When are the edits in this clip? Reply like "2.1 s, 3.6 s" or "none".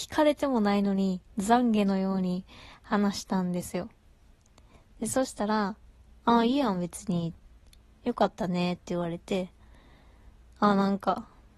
8.8 s

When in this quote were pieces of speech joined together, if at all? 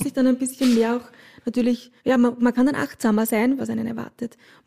2.0 s, 3.6 s

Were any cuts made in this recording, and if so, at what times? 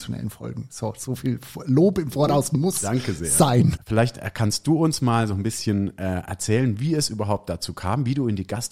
3.8 s

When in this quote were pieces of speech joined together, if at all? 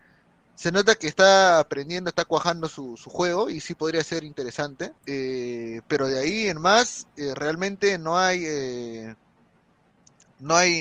5.0 s

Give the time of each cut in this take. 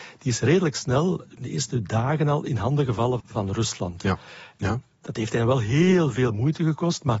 3.2 s, 4.6 s

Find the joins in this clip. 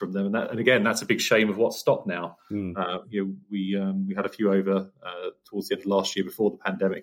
none

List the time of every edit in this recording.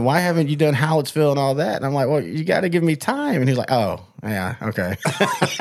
none

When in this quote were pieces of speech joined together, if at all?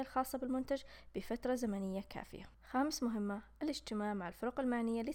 2.5 s

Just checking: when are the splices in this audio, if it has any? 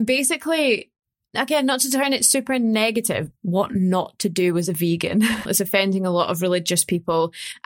3.3 s, 5.5 s

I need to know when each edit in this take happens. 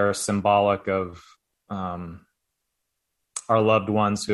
none

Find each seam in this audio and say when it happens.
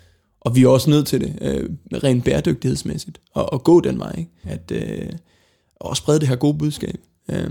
4.4 s

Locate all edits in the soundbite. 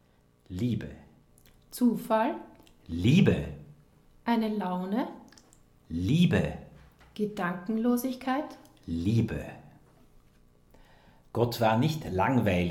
none

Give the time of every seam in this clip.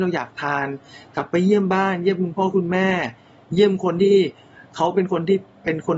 none

